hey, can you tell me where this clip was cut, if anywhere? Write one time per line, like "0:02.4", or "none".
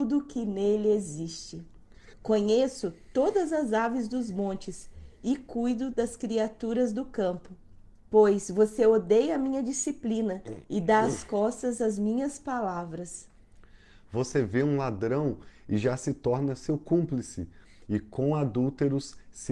0:02.1
0:08.0